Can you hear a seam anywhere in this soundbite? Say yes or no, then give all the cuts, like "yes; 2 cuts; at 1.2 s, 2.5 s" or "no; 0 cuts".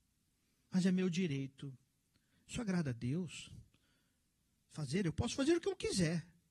yes; 1 cut; at 2.3 s